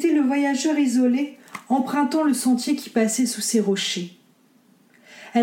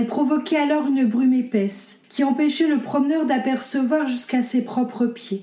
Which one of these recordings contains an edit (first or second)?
second